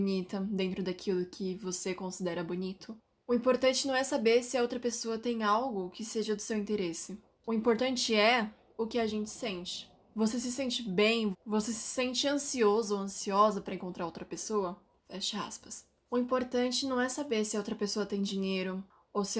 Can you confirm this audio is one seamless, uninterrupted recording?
no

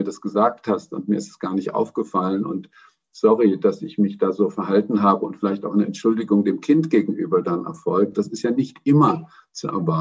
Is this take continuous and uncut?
yes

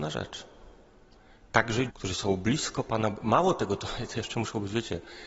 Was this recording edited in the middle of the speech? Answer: yes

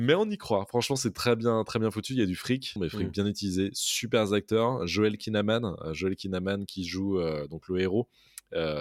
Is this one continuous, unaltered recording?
no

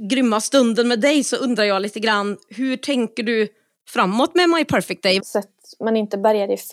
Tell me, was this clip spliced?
yes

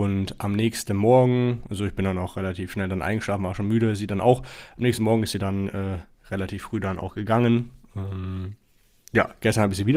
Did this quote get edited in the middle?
no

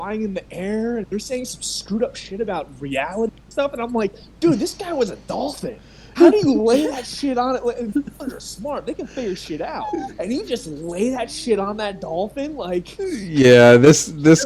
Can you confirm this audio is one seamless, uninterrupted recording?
no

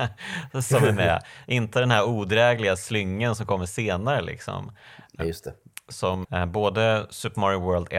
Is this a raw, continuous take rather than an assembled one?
no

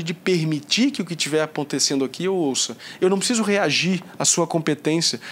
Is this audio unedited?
no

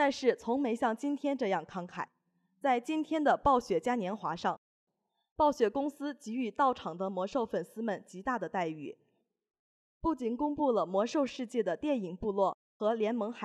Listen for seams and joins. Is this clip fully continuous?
yes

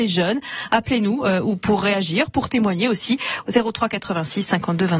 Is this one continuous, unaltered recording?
yes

